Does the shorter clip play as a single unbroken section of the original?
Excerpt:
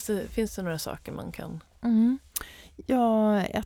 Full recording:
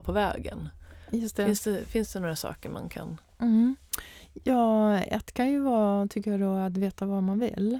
yes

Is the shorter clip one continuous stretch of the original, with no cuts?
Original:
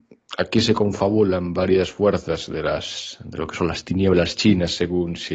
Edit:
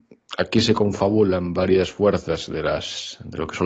yes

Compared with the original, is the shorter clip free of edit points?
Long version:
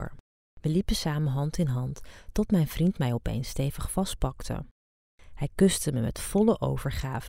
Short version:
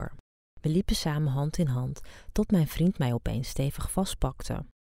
yes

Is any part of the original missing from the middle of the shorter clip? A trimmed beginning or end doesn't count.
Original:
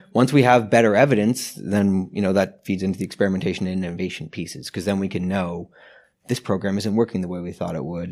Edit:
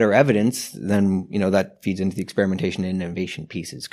no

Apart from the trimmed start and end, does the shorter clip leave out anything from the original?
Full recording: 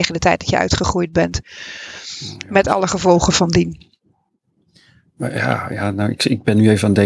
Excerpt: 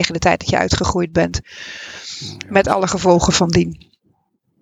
no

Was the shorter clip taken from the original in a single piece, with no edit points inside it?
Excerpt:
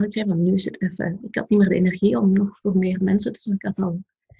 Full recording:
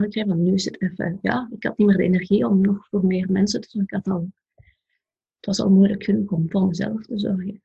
no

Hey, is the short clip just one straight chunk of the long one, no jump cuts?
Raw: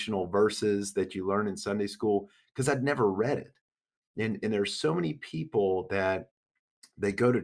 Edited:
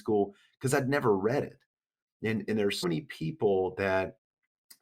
no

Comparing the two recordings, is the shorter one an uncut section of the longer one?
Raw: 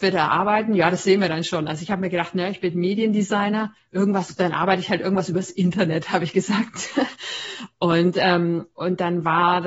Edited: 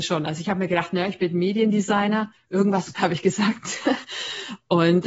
no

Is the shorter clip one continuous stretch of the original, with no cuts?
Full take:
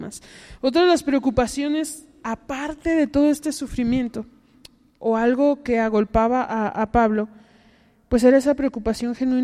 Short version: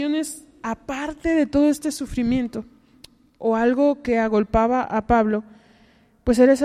no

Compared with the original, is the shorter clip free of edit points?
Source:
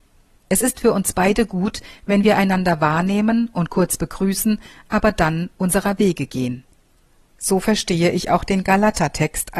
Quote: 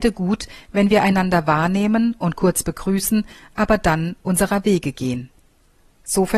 yes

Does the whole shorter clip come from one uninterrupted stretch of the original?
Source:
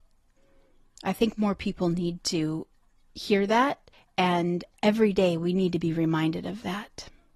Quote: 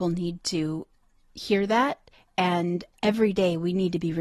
yes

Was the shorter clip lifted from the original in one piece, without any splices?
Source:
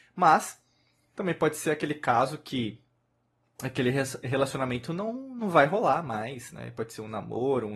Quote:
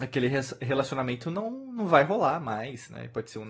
yes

